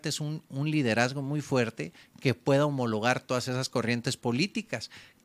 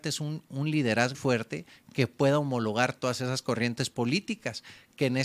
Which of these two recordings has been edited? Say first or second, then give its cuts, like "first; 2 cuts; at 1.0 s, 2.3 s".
second; 1 cut; at 1.1 s